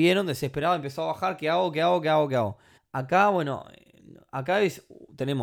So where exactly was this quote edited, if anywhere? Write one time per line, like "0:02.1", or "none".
0:02.8